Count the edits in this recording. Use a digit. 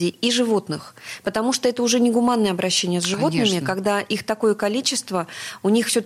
0